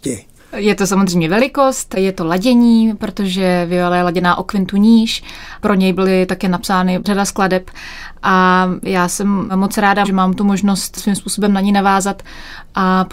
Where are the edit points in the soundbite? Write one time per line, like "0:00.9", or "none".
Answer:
0:05.6
0:10.0